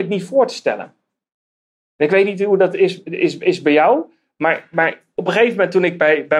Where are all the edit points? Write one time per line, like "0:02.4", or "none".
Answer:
none